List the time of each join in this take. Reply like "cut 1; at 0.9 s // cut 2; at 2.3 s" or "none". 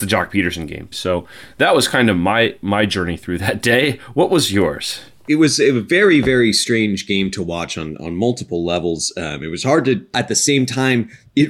cut 1; at 0.9 s // cut 2; at 10.1 s